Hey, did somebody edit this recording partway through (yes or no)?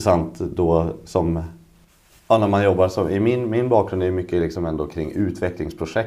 no